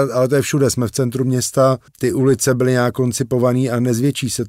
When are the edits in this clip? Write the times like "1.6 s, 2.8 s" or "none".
1.9 s